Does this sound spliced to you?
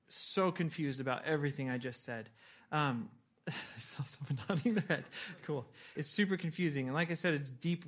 yes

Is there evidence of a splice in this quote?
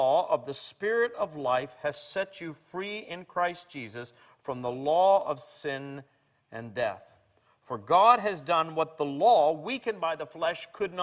no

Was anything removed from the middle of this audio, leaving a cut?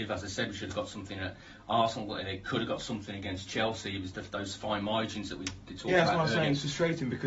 no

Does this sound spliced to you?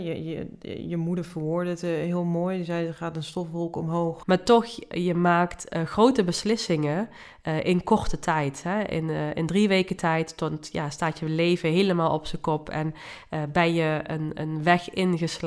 yes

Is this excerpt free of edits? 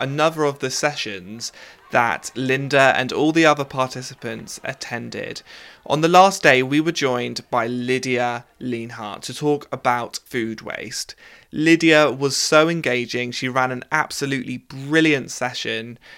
no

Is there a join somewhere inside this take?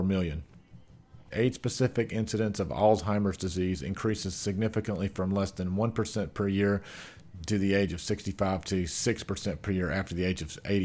yes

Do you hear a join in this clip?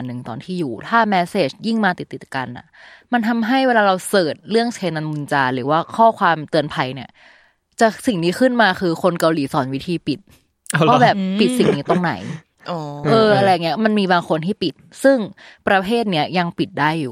no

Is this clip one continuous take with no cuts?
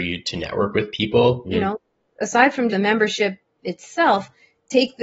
no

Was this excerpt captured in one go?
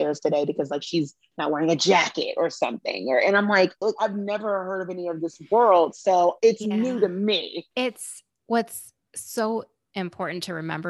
no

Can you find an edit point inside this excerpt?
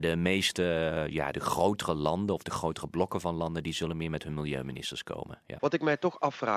yes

